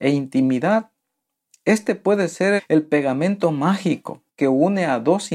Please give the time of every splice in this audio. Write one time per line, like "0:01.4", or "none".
0:02.6